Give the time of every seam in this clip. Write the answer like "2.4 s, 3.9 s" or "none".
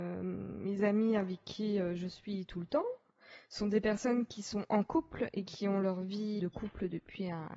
6.4 s